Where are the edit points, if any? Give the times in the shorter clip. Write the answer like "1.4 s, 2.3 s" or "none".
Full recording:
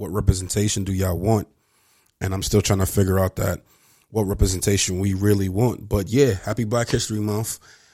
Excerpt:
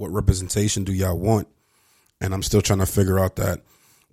none